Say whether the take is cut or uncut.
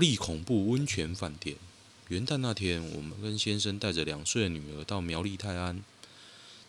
uncut